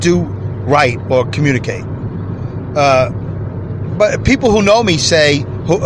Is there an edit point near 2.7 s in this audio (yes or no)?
no